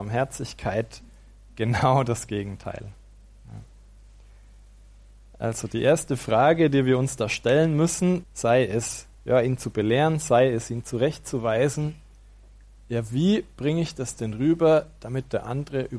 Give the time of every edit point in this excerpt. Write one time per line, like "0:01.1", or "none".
0:08.2